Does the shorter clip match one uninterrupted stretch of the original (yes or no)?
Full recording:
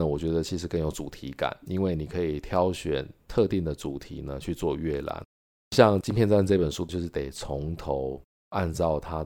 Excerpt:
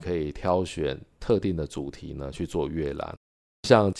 yes